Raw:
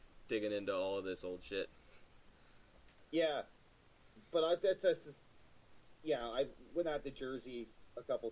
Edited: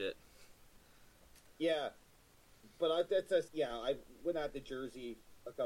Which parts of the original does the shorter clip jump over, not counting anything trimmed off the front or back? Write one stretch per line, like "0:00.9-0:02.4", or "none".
0:05.0-0:06.0